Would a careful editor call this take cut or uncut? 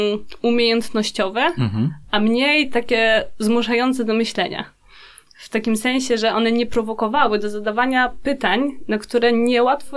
uncut